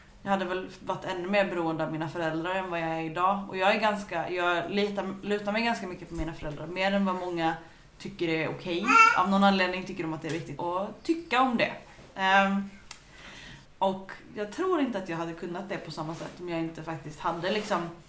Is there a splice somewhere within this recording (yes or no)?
yes